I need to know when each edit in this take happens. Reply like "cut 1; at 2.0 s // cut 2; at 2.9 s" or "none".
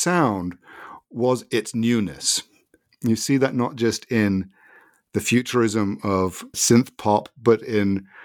cut 1; at 6.5 s